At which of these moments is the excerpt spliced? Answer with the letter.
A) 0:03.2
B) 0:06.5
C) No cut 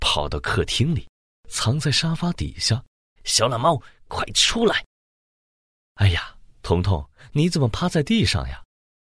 A